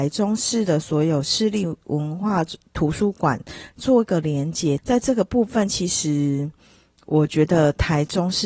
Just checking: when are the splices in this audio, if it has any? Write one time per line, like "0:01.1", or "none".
0:04.8